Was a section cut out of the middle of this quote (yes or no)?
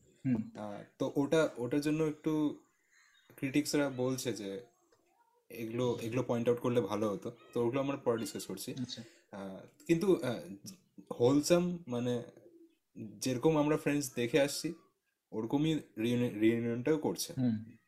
no